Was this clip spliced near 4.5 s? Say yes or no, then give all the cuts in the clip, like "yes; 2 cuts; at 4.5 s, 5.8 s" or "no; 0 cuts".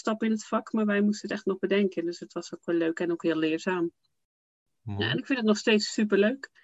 no; 0 cuts